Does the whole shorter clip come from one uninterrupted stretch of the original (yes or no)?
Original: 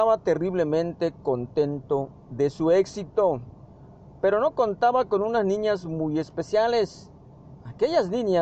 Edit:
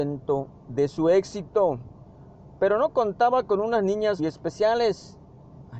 no